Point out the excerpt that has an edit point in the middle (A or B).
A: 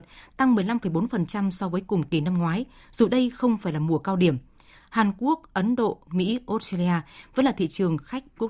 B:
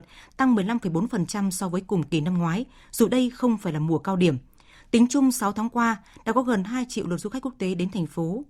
A